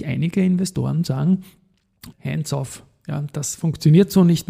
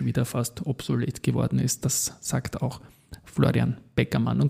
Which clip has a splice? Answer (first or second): first